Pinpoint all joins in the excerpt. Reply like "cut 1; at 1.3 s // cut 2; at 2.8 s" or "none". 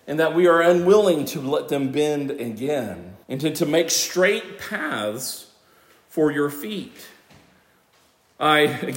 cut 1; at 3.2 s